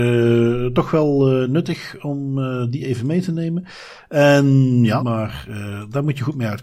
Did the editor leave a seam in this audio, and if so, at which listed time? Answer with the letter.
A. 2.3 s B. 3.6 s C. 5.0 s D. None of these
C